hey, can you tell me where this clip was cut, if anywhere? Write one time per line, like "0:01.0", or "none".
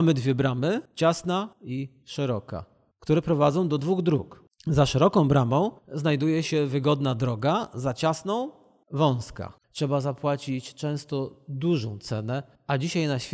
0:09.6